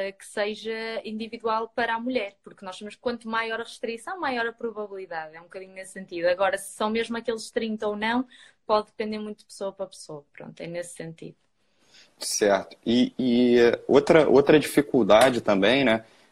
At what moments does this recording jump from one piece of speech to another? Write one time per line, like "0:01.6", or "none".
none